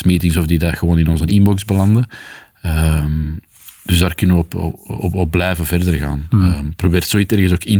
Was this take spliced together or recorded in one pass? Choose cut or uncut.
uncut